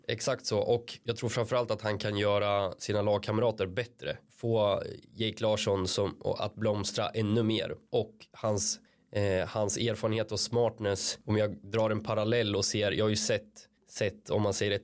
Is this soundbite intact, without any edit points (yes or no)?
yes